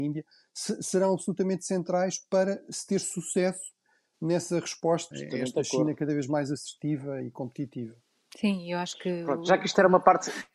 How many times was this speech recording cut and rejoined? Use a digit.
1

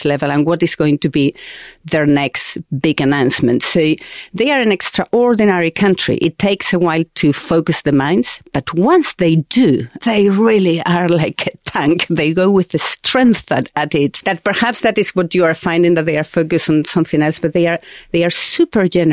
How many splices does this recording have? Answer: 2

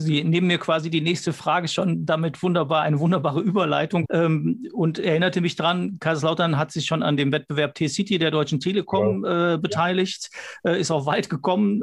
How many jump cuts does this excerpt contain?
1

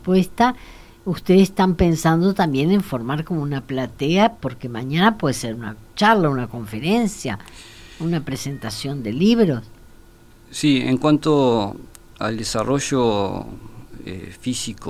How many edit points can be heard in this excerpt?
0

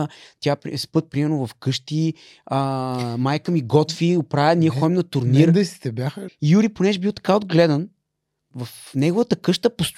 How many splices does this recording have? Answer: 2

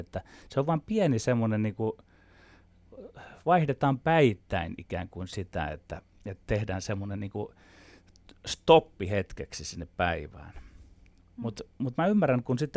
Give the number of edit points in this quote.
0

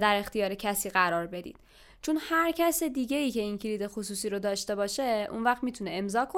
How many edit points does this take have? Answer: 0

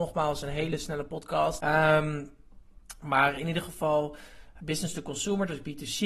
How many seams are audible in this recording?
2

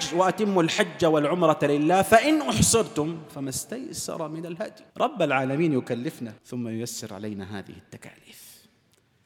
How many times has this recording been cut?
2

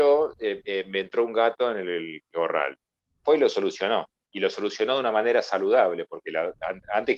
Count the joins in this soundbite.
0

